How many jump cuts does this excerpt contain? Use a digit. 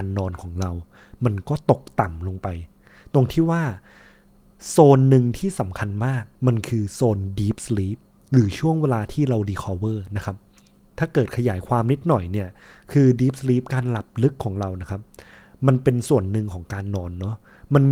1